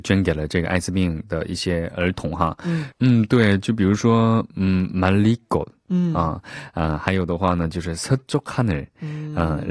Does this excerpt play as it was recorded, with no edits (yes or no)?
no